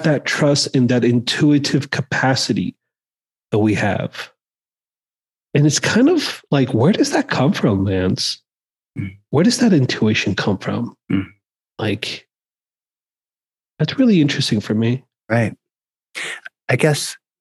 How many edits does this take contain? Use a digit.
0